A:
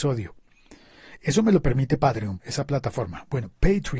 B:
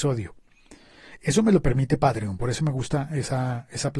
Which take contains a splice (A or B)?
A